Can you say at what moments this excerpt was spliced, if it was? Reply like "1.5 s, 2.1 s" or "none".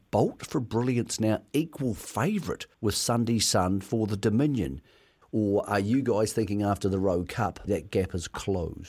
2.7 s, 5.2 s, 7.7 s